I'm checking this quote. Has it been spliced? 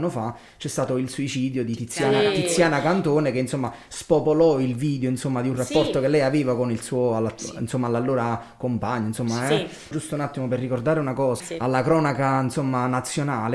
yes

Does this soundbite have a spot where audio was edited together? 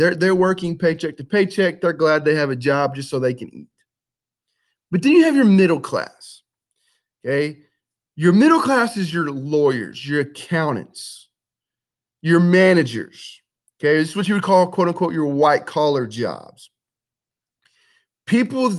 no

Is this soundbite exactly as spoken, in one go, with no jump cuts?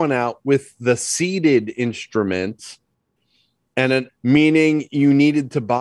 no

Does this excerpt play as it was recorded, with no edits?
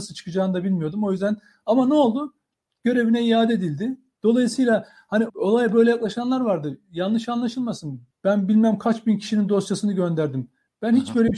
no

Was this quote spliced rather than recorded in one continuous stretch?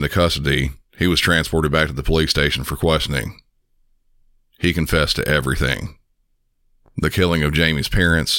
no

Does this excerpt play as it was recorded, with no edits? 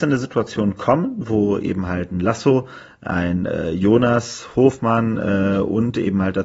yes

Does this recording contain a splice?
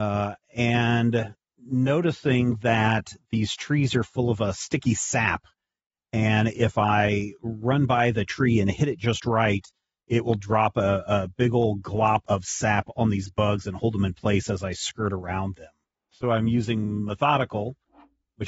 yes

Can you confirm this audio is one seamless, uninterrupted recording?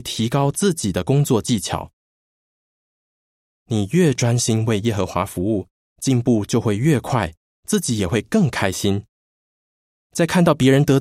yes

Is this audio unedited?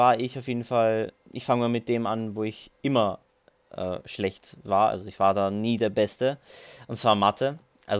yes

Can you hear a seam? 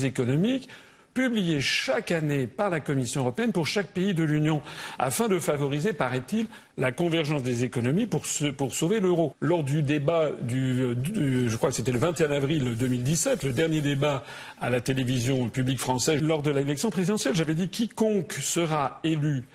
yes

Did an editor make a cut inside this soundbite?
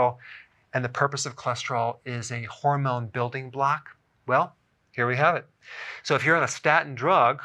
no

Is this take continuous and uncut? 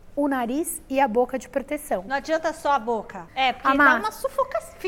no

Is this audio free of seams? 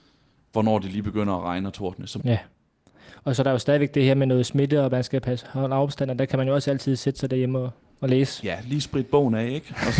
no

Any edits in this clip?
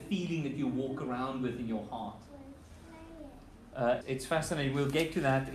yes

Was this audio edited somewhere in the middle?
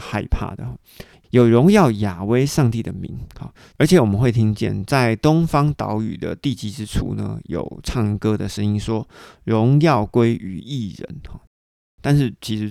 yes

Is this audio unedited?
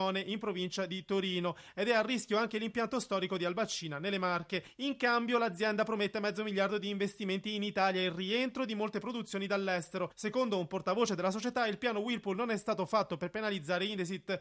yes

